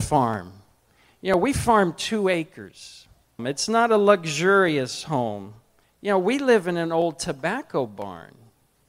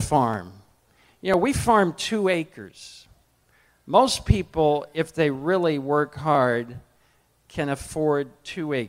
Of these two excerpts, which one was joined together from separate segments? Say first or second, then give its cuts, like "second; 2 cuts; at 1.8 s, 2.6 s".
first; 2 cuts; at 3.4 s, 5.8 s